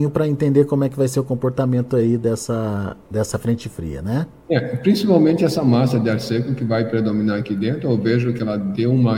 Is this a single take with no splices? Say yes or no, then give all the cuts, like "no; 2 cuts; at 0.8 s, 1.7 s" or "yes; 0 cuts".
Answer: no; 1 cut; at 3.0 s